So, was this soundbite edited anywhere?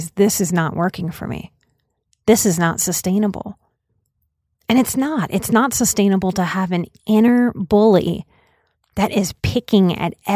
no; 0 cuts

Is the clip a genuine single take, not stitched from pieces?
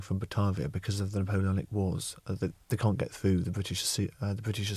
yes; 0 cuts

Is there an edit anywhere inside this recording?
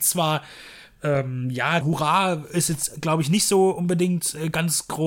yes; 1 cut; at 1.8 s

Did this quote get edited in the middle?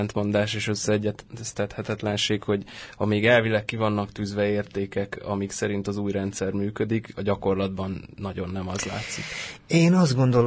no; 0 cuts

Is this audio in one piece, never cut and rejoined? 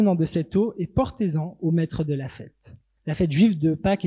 no; 1 cut; at 3.0 s

